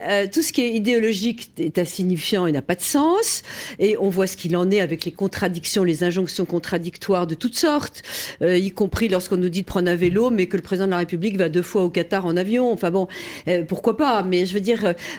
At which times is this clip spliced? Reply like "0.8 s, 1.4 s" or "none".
none